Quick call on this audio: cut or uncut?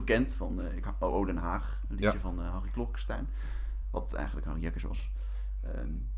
uncut